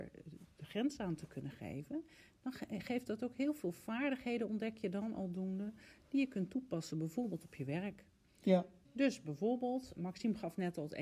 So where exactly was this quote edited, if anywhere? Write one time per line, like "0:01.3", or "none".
0:08.8
0:10.0

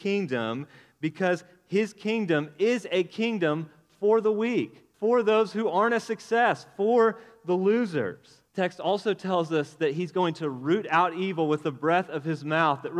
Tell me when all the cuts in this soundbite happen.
0:04.9
0:08.5

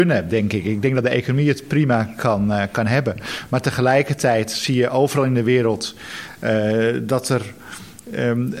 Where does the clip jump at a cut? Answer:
none

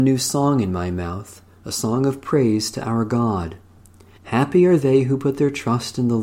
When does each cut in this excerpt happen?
0:04.2

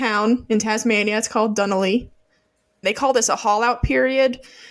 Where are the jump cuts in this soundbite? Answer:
0:02.8

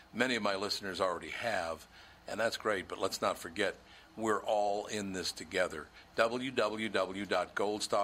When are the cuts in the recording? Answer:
none

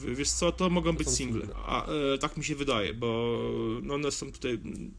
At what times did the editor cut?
0:01.5

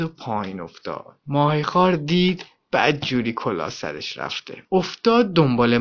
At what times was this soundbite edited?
none

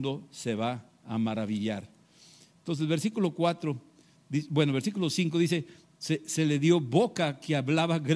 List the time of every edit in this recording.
0:05.8

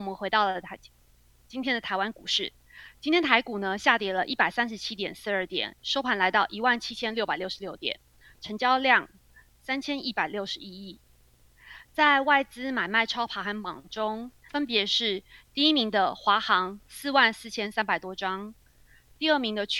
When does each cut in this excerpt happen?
0:11.8
0:14.5

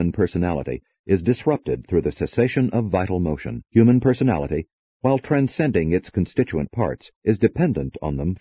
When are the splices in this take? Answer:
0:03.7
0:07.2

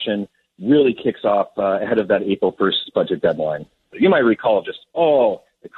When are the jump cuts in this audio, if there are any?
0:03.9

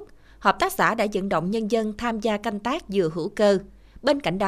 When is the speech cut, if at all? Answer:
none

